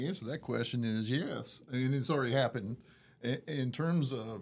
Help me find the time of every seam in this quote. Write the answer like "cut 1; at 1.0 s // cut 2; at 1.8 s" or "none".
none